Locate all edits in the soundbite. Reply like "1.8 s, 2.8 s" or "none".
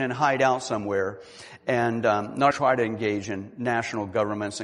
2.5 s